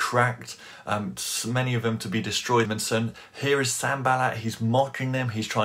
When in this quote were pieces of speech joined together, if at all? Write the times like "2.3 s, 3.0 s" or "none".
2.7 s